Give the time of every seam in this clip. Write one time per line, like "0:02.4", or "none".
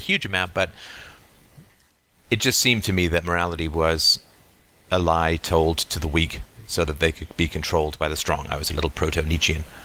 none